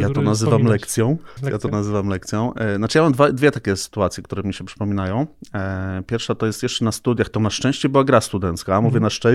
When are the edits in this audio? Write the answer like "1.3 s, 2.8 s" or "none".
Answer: 1.4 s